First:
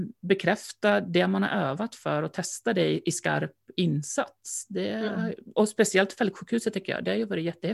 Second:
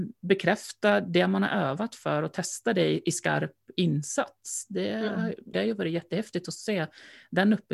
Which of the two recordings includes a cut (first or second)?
second